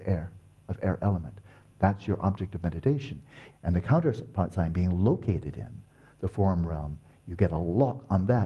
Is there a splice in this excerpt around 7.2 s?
no; 2 cuts; at 1.7 s, 3.5 s

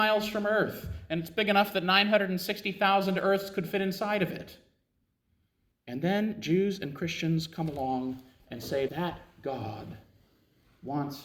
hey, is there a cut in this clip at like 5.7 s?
yes; 2 cuts; at 5.7 s, 8.9 s

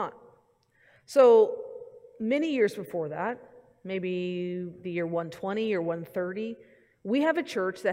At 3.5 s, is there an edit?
no; 0 cuts

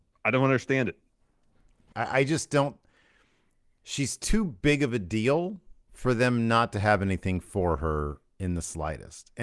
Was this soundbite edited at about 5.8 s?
yes; 2 cuts; at 1.9 s, 5.8 s

